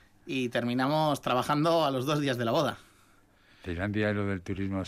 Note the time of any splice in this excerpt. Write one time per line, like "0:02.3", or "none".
none